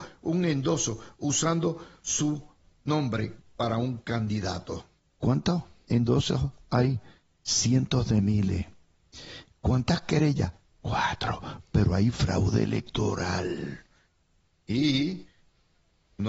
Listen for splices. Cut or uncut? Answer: cut